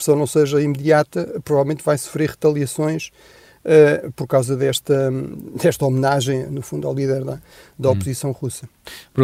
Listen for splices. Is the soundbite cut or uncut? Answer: uncut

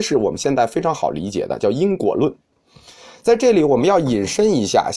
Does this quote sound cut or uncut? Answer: uncut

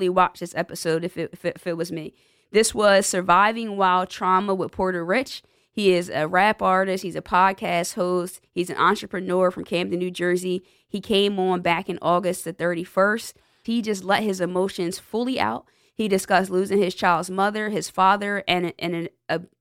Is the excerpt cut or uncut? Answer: cut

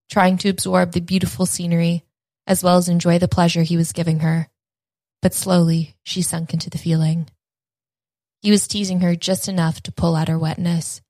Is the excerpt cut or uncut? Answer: uncut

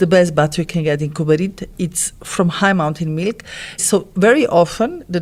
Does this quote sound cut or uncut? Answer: cut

